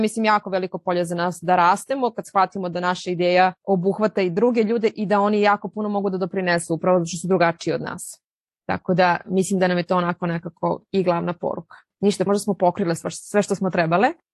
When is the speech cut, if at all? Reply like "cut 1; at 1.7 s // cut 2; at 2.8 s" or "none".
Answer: cut 1; at 3.6 s // cut 2; at 12.3 s